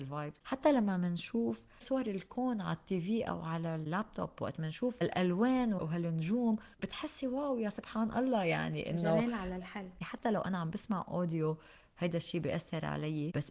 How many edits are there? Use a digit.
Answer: 1